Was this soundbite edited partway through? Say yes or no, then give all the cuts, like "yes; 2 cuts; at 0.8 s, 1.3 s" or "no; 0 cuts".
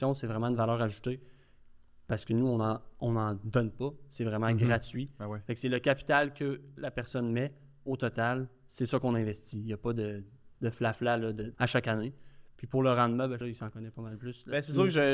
yes; 2 cuts; at 11.5 s, 13.4 s